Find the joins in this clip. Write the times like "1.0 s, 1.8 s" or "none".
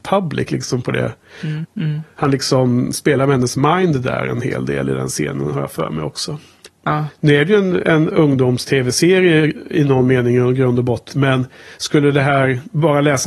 1.6 s, 6.7 s, 11.1 s